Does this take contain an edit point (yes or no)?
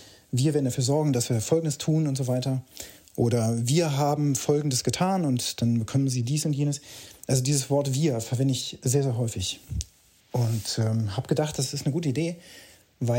no